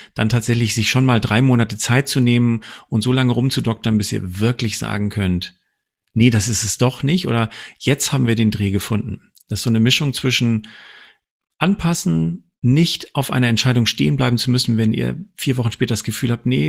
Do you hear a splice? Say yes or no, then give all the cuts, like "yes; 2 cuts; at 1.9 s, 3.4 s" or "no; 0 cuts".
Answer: no; 0 cuts